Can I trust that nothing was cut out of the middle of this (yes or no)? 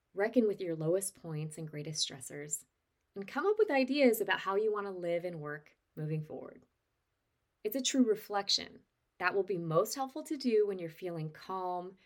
no